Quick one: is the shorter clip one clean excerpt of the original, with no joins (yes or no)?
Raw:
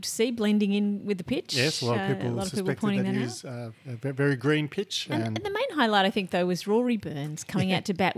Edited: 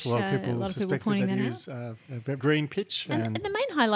no